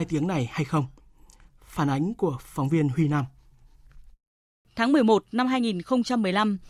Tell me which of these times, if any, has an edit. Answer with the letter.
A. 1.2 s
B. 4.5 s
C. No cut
C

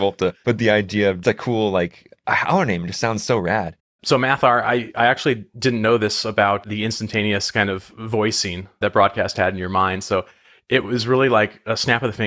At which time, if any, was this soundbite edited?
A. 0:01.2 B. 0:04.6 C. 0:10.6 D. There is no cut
A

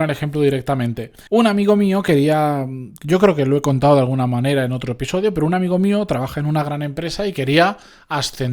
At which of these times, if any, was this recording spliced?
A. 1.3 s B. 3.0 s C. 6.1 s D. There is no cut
A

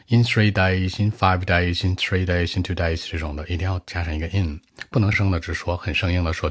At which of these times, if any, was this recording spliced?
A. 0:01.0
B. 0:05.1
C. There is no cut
B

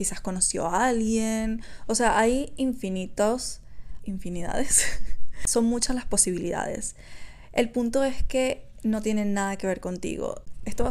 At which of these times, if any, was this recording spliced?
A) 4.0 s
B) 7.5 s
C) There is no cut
A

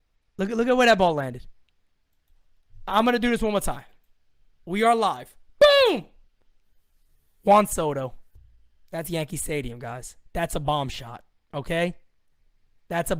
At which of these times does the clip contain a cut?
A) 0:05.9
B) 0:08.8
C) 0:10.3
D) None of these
D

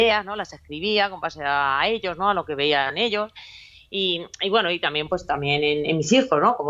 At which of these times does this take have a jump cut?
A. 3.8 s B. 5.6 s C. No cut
C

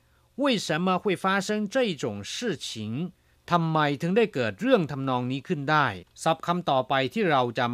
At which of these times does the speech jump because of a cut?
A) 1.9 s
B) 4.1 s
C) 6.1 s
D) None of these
C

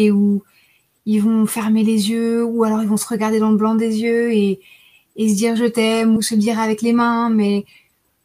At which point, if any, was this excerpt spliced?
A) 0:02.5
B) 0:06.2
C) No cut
B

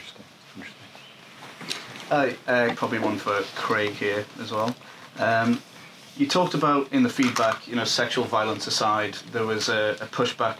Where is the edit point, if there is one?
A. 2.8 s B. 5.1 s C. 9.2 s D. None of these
A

